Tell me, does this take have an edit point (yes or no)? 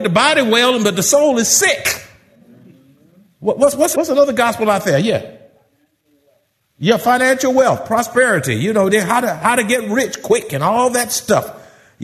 yes